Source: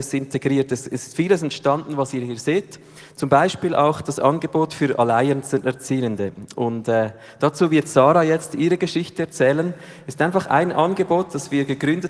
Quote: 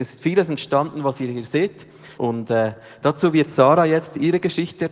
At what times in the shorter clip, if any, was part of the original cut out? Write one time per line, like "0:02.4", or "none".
0:02.2